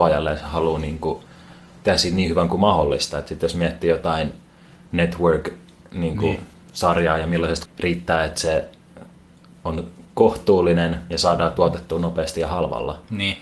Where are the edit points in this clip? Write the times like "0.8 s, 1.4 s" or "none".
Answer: 7.7 s